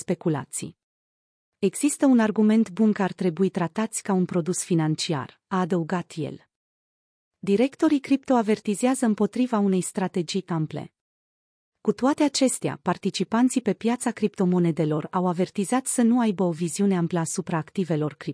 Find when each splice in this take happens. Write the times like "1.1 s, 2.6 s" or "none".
none